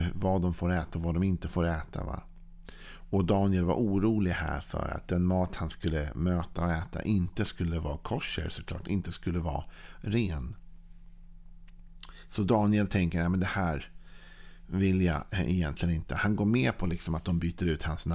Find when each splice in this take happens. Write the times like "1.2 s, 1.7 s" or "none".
none

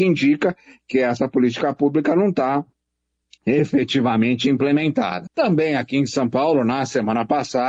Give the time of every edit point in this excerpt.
5.3 s

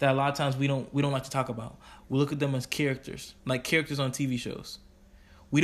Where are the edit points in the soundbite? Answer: 2.0 s, 3.4 s

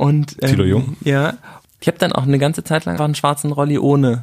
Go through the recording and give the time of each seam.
1.8 s, 3.0 s

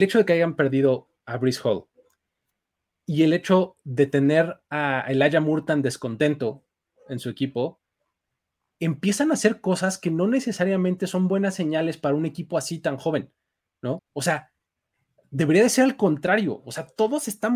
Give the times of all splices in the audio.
14.0 s

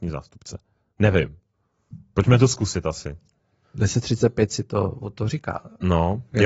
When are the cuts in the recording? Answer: 3.6 s

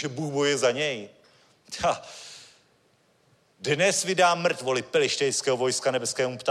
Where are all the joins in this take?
none

